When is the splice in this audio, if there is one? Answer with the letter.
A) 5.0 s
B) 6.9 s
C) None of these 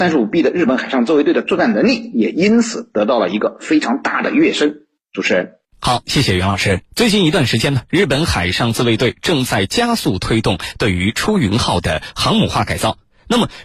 B